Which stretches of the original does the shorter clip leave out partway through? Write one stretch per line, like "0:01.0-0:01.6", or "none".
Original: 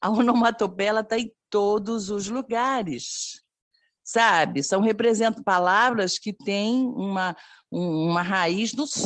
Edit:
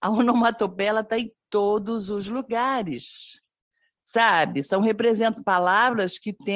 none

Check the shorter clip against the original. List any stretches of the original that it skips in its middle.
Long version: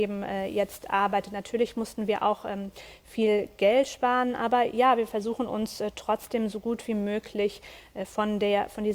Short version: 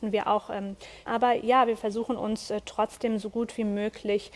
0:03.0-0:04.4

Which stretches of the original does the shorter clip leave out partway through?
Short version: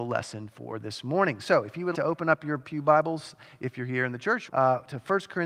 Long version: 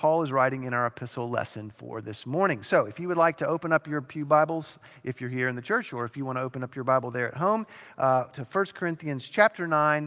0:03.1-0:03.4
0:05.9-0:07.9

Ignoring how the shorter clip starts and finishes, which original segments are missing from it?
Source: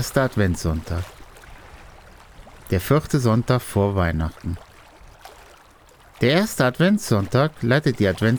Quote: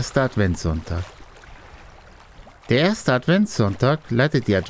0:02.5-0:06.0

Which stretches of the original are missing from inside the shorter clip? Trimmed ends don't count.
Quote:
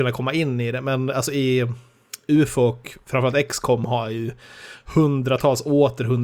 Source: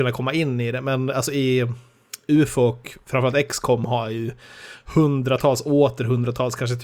none

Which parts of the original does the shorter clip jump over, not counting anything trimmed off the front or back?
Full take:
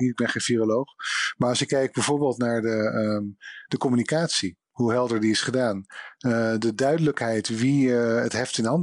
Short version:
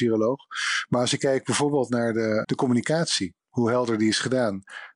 0:02.9-0:03.7

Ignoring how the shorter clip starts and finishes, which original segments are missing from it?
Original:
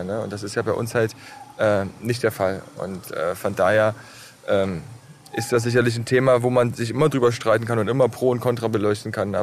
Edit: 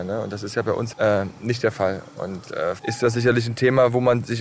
0:00.9-0:01.5
0:03.4-0:05.3

